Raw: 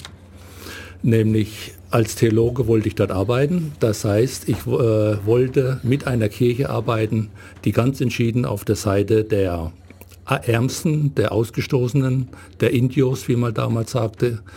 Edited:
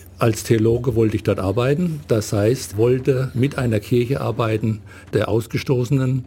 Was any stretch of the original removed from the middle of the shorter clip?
yes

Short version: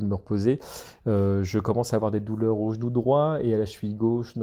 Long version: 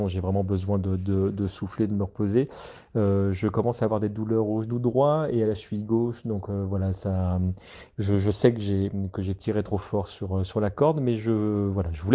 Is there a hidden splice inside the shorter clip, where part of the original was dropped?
no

